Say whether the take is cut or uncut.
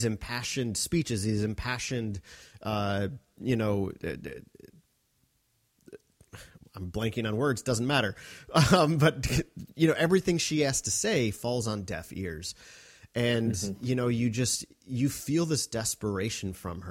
uncut